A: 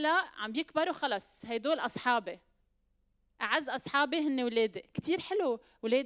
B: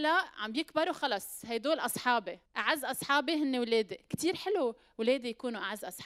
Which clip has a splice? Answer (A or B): B